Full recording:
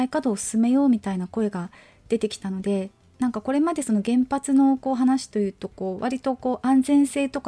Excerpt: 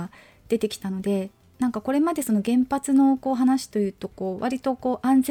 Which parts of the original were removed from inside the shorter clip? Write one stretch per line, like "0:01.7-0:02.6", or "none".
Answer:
none